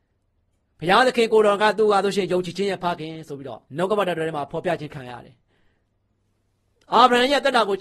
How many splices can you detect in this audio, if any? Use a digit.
1